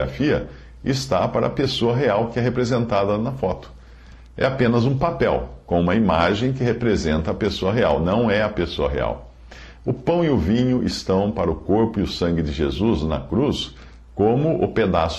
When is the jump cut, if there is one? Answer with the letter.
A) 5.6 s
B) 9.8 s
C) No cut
B